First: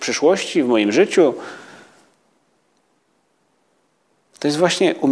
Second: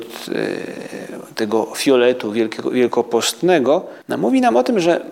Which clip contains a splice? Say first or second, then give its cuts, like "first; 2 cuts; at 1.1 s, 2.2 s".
second; 1 cut; at 4.0 s